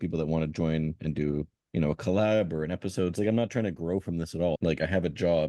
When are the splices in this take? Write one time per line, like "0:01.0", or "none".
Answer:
0:03.2
0:04.6